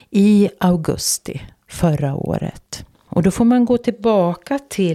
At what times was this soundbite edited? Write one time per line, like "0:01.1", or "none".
0:03.1